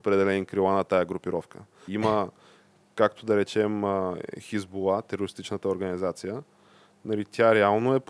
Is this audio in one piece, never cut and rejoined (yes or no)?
no